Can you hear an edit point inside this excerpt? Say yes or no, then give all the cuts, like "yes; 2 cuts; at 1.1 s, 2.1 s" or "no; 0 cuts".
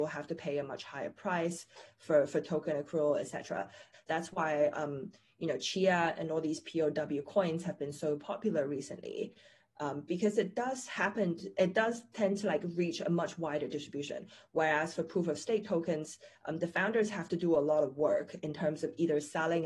yes; 1 cut; at 3.9 s